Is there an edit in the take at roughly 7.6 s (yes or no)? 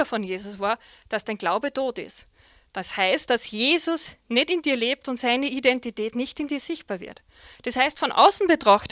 no